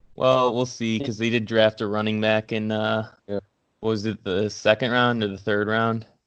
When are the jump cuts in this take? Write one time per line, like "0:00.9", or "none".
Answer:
0:03.2